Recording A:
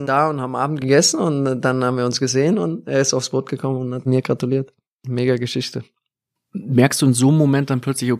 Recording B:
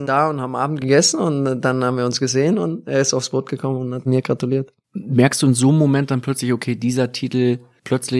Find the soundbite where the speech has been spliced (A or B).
B